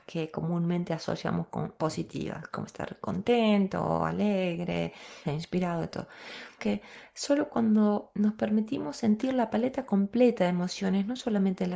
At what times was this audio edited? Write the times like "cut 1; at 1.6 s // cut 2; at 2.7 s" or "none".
cut 1; at 5.2 s // cut 2; at 6.6 s